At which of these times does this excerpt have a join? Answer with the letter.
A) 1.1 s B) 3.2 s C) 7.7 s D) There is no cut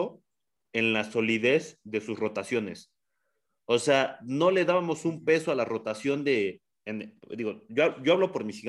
D